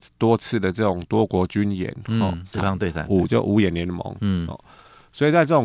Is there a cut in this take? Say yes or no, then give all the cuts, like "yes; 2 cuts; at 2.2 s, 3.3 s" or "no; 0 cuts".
yes; 1 cut; at 2.5 s